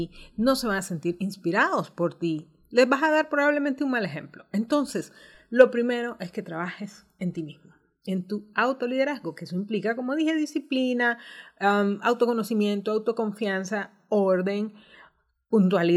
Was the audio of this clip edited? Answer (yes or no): no